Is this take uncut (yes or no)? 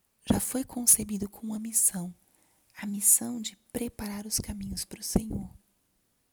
yes